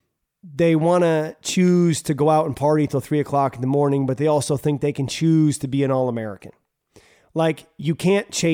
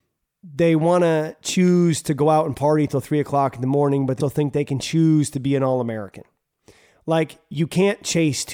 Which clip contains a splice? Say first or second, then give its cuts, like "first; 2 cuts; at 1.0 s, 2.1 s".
second; 1 cut; at 4.2 s